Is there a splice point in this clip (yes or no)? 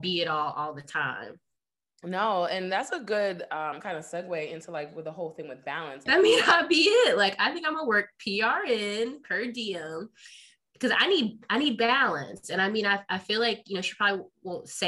yes